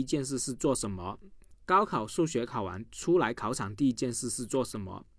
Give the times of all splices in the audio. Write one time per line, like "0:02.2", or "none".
0:01.5

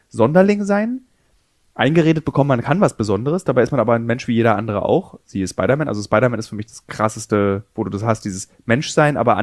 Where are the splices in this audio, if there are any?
none

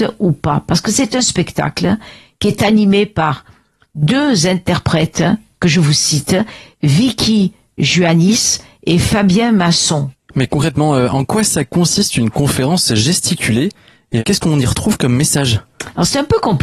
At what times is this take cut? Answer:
0:10.1

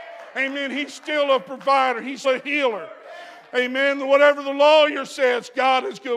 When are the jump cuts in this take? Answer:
0:02.2

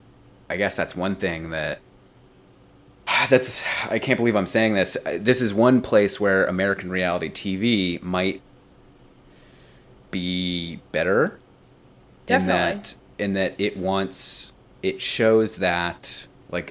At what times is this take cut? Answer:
none

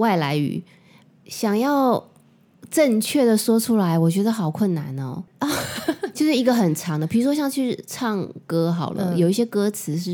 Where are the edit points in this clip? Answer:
0:05.3

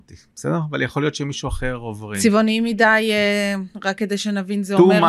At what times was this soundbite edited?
none

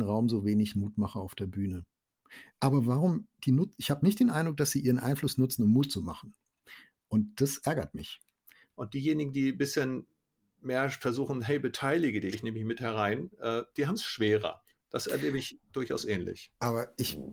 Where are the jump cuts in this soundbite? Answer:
0:02.5
0:08.7
0:12.3

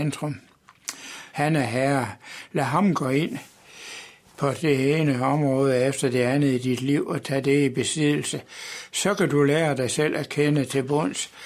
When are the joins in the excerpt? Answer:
0:01.3

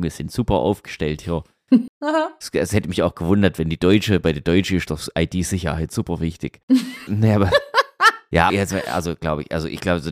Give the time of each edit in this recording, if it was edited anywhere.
0:01.9
0:07.1
0:08.5

